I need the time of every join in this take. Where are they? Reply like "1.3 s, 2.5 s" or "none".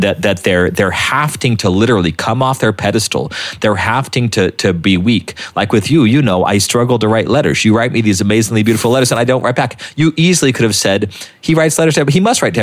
none